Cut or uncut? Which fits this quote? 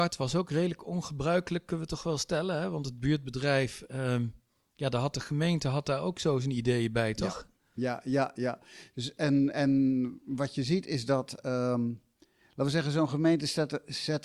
uncut